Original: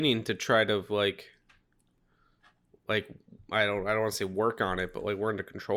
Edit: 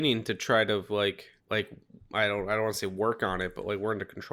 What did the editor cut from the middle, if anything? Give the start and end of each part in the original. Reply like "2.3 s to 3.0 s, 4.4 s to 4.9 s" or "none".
1.4 s to 2.8 s